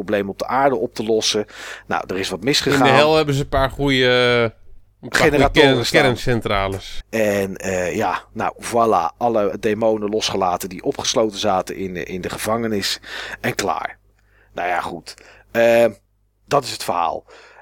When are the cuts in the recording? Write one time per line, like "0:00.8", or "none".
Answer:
0:07.0